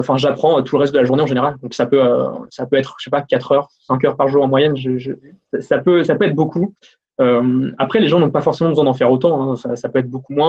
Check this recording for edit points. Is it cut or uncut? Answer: uncut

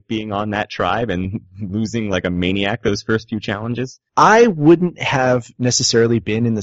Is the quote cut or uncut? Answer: cut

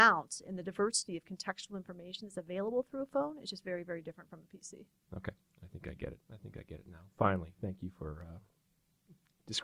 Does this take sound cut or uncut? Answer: uncut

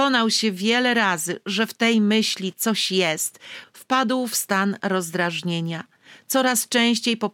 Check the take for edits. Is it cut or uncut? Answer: cut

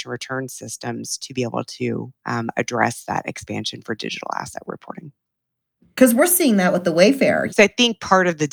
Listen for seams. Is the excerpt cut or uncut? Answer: cut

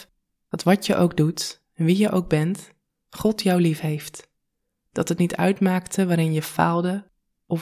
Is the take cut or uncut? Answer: uncut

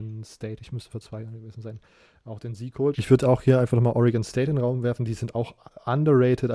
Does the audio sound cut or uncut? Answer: cut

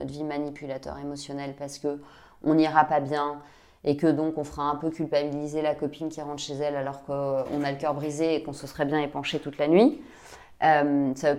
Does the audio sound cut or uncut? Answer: uncut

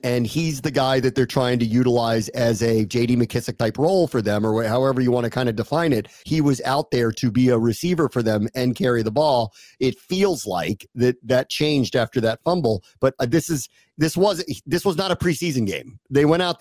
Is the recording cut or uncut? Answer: uncut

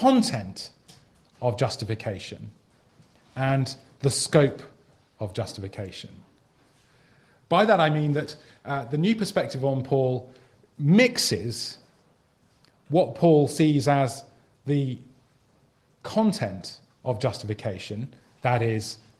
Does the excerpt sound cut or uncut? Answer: uncut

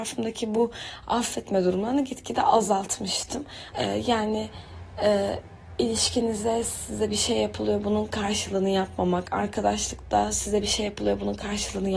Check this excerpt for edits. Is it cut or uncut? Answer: cut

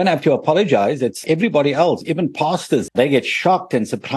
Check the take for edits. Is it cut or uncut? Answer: cut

